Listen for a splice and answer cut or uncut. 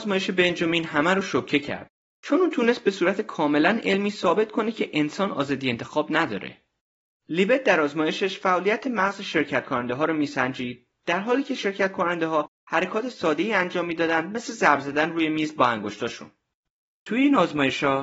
cut